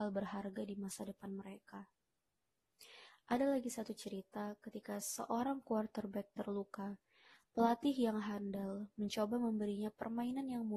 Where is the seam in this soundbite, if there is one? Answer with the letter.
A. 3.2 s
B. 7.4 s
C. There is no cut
B